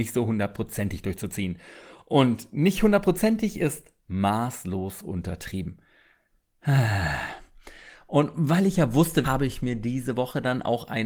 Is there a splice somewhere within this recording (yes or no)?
yes